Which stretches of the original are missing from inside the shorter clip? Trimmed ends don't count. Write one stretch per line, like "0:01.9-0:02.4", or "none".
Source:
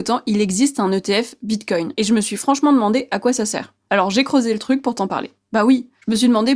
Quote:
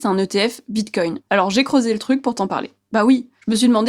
0:01.9-0:03.8